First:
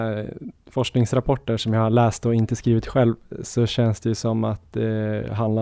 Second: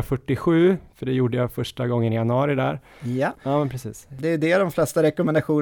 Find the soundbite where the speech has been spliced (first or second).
second